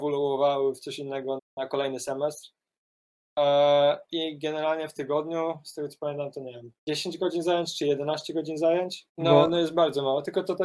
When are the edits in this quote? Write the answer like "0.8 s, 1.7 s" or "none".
1.4 s, 6.8 s, 9.1 s